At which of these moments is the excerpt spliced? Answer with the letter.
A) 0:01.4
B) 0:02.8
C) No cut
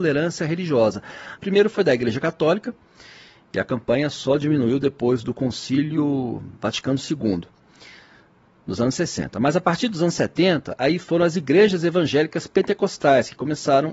A